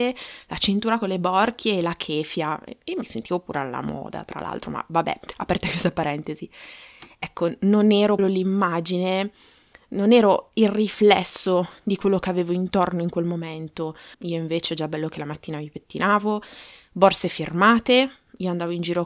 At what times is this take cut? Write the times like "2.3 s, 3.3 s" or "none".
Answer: 8.2 s, 14.1 s